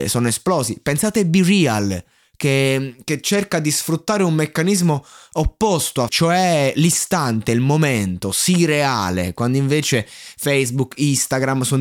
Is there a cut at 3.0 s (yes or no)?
no